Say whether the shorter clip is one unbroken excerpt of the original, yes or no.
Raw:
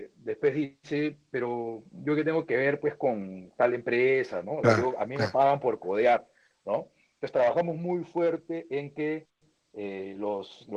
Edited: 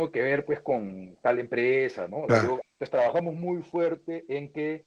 no